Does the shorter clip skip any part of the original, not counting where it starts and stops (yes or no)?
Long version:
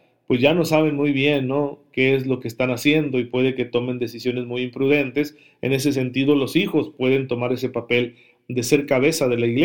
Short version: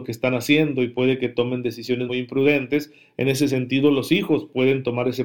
yes